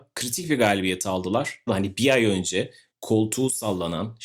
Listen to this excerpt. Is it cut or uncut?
cut